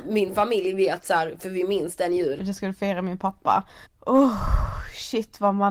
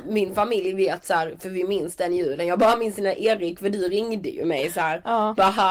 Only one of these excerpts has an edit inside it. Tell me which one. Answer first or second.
first